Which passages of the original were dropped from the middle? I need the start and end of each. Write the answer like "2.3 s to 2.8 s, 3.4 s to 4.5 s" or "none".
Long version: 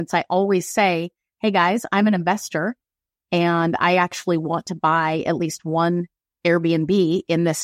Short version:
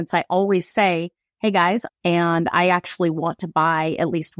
1.9 s to 3.2 s